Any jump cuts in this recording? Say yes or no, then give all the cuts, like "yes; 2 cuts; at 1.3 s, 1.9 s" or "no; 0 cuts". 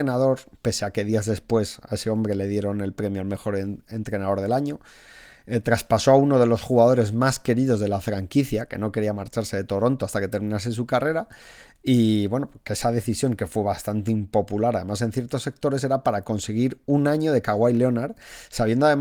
no; 0 cuts